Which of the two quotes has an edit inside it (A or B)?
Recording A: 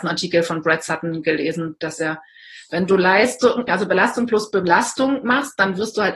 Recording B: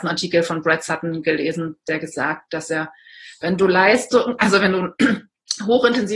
A